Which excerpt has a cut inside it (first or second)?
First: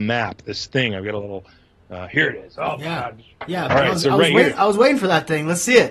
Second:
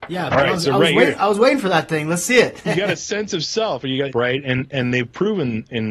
second